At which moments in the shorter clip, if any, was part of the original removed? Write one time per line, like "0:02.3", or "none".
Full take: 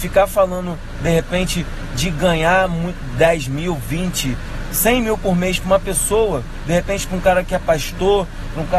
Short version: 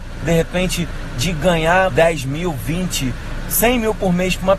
0:01.9